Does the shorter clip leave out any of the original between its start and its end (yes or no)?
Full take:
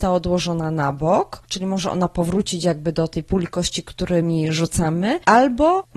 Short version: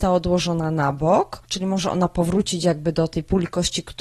no